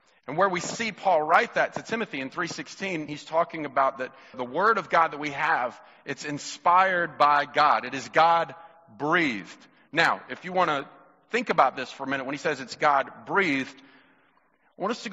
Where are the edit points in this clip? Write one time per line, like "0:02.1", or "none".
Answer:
0:03.1
0:04.3